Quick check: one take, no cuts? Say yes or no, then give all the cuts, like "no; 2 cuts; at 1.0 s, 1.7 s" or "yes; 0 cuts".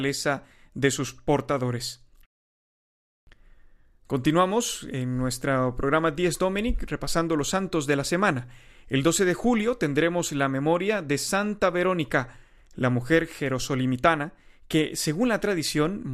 yes; 0 cuts